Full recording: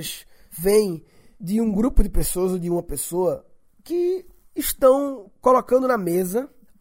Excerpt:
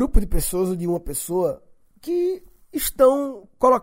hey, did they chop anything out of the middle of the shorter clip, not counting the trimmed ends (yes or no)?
no